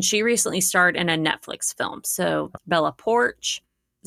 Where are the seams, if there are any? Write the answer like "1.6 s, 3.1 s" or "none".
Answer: 2.5 s